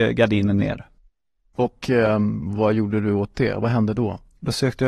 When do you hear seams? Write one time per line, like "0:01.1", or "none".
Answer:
none